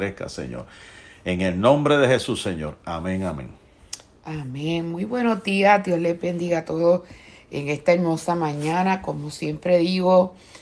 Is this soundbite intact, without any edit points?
yes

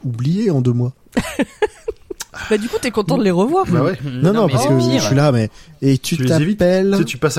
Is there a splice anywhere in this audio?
no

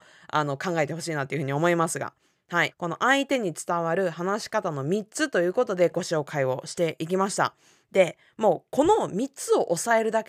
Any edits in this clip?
yes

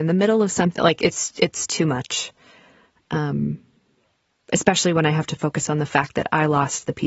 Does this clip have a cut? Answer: no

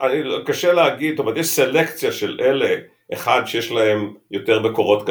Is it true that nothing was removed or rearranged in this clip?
yes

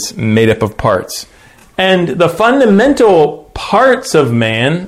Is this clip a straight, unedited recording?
yes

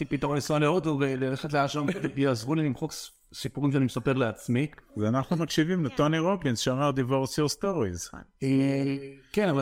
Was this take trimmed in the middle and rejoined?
no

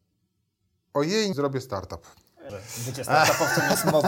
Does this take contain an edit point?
yes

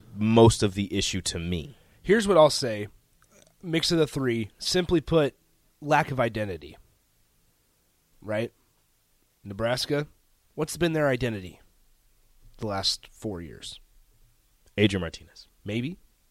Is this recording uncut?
yes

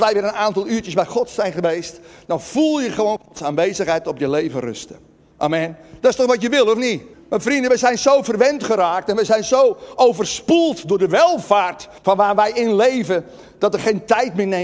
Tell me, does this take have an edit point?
yes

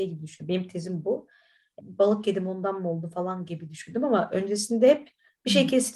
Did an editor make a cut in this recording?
yes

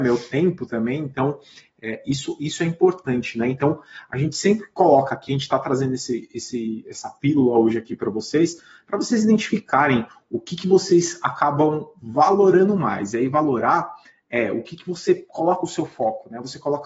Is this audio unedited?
yes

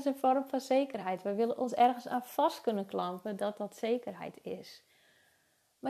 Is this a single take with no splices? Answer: yes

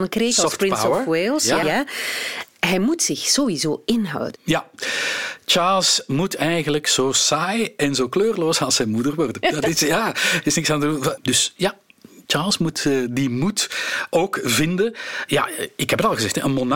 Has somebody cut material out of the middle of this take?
yes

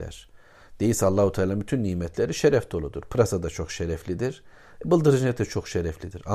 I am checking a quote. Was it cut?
no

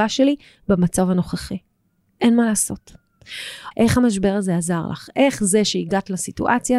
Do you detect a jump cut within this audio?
yes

